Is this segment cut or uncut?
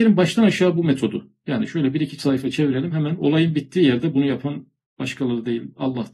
uncut